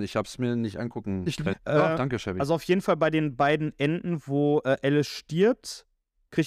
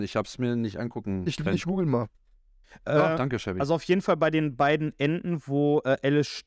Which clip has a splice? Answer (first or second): first